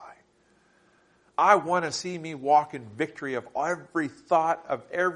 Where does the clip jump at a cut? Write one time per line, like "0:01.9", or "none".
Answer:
none